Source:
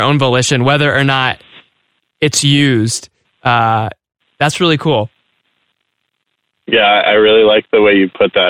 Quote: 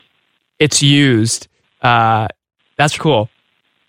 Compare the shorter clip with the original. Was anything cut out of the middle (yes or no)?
yes